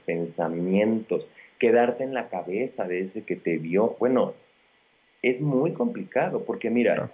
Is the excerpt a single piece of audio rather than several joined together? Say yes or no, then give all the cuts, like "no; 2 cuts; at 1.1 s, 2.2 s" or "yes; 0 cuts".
yes; 0 cuts